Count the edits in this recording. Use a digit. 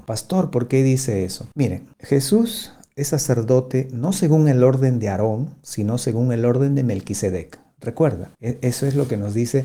1